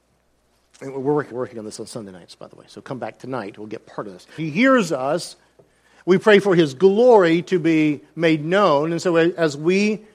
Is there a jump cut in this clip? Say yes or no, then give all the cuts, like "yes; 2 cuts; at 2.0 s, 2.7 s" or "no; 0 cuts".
yes; 2 cuts; at 1.3 s, 4.4 s